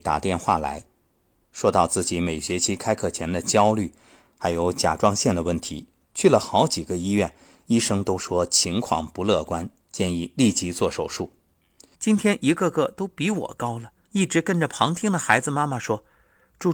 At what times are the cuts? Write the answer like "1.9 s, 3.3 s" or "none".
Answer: 11.9 s, 14.1 s